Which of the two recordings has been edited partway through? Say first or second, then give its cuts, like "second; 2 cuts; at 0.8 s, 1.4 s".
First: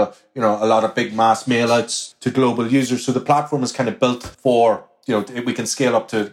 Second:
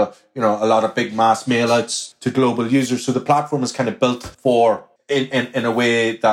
second; 1 cut; at 5.0 s